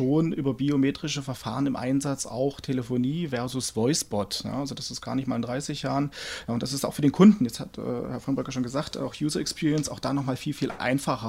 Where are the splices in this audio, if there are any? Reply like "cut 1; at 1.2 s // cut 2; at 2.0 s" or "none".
none